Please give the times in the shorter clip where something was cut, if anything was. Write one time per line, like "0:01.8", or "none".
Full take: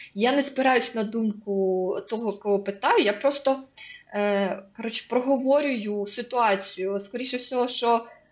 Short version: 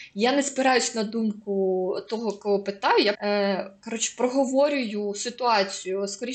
0:03.1